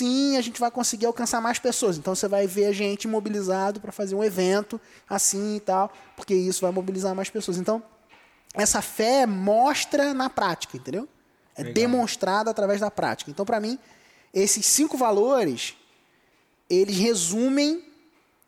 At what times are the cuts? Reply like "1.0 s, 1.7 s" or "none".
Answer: none